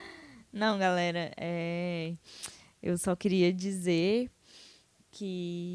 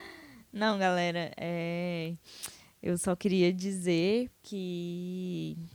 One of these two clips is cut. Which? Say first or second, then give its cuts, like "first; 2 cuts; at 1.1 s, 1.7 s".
second; 1 cut; at 4.3 s